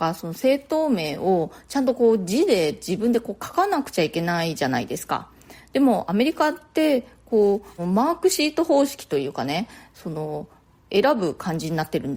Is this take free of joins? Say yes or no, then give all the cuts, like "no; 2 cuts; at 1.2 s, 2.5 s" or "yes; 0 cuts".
no; 1 cut; at 7.8 s